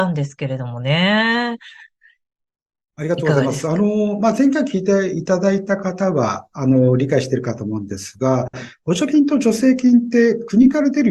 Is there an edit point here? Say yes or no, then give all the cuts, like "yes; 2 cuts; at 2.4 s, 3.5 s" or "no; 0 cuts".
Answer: no; 0 cuts